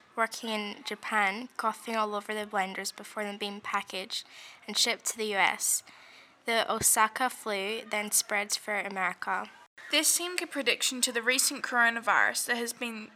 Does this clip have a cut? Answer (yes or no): yes